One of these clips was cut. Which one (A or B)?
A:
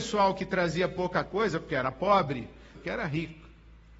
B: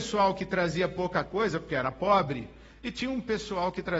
A